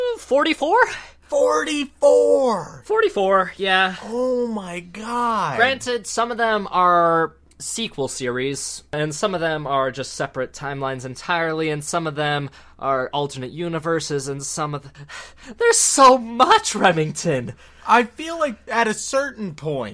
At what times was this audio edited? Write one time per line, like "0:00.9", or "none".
none